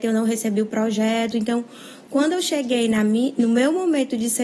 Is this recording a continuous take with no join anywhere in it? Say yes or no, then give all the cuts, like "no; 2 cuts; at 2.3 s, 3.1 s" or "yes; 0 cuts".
yes; 0 cuts